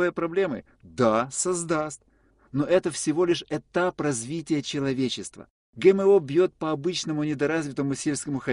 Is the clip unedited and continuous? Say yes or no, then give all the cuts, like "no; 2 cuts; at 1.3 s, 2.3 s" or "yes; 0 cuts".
yes; 0 cuts